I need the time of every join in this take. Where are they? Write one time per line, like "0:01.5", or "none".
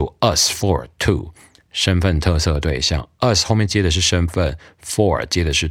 none